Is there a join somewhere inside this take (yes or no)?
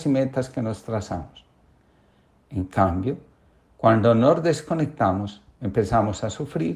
no